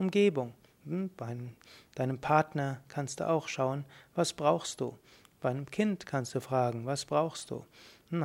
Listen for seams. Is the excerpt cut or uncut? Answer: uncut